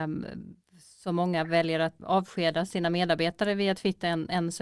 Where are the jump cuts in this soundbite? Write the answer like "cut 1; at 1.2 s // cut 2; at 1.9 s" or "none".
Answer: cut 1; at 2.0 s

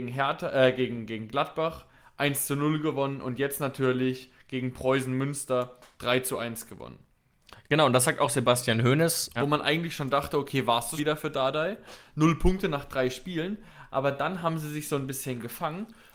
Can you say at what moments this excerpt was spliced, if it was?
cut 1; at 7.6 s // cut 2; at 9.4 s // cut 3; at 11.0 s

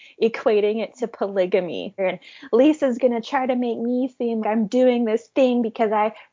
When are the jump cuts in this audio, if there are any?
cut 1; at 2.0 s // cut 2; at 4.4 s

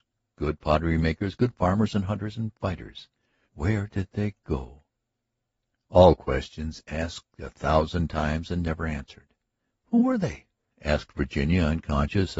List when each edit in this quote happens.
cut 1; at 3.4 s // cut 2; at 9.7 s

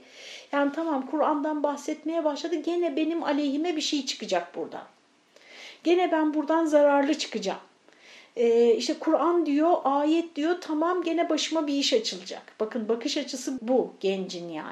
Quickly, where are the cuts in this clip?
cut 1; at 13.6 s

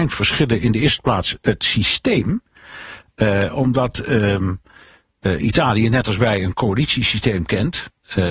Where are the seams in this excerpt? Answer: none

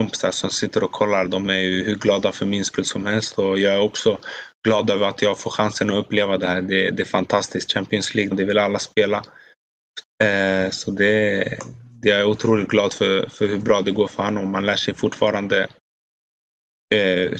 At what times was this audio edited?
cut 1; at 8.3 s // cut 2; at 10.0 s

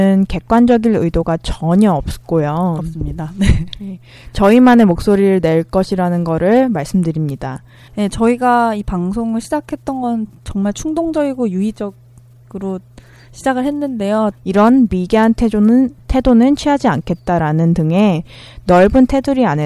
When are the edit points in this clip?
cut 1; at 7.9 s // cut 2; at 14.3 s

